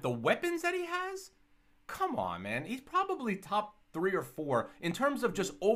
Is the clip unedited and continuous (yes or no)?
yes